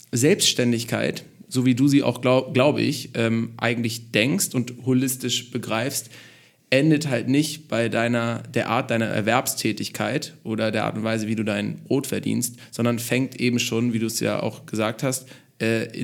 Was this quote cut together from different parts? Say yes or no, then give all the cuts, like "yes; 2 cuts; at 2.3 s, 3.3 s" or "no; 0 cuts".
no; 0 cuts